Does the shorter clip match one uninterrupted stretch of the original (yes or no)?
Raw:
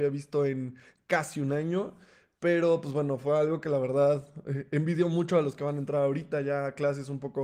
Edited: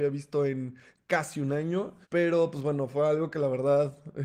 no